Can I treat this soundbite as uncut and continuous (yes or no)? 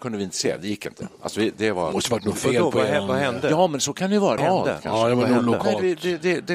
no